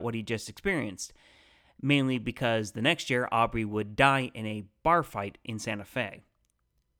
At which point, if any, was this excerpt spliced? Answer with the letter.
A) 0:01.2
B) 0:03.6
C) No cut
C